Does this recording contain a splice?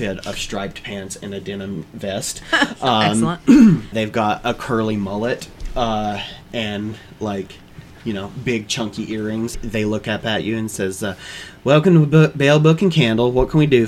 yes; 2 cuts; at 3.9 s, 9.5 s

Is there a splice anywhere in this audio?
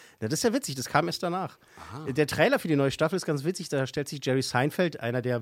no; 0 cuts

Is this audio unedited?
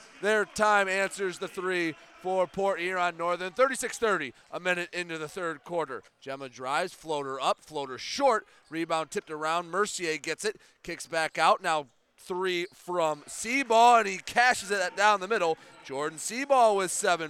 no; 1 cut; at 6.1 s

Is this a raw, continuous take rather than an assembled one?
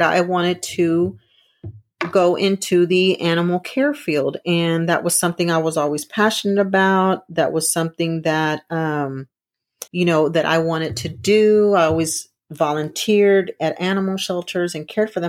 no; 1 cut; at 9.9 s

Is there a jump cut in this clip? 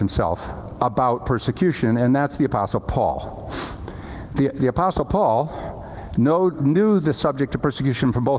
yes; 1 cut; at 6.5 s

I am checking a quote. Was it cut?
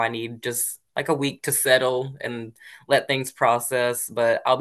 no; 0 cuts

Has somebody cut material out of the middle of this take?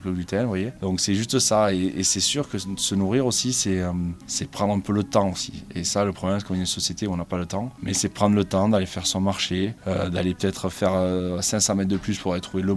no; 0 cuts

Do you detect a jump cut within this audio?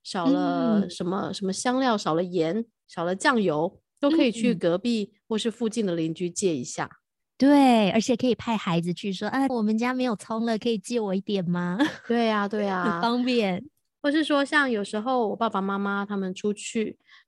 yes; 1 cut; at 9.5 s

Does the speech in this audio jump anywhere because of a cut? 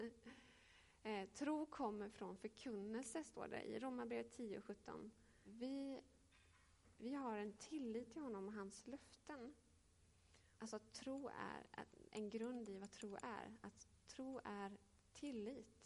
yes; 2 cuts; at 5.4 s, 10.6 s

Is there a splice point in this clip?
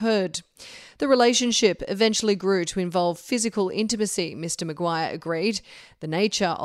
no; 0 cuts

